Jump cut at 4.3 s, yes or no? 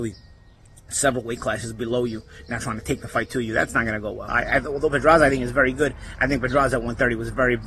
yes